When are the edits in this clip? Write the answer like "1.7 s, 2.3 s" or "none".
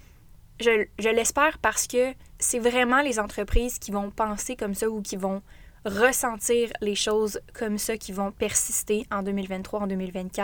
2.3 s